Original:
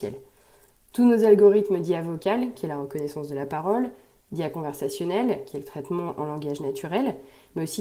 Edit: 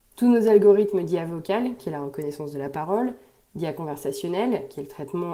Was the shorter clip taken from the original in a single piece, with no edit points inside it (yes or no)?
yes